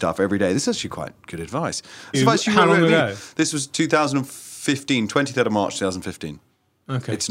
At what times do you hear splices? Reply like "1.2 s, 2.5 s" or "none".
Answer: 2.1 s